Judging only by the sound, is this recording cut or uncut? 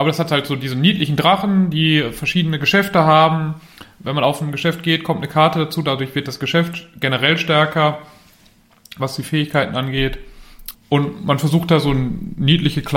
cut